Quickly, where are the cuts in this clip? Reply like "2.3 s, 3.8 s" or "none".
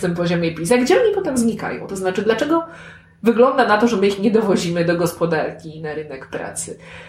none